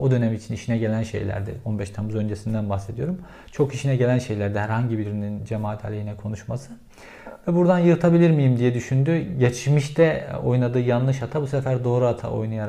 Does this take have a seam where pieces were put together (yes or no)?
no